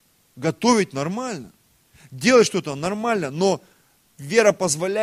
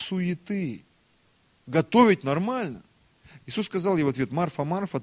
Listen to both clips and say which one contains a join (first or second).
second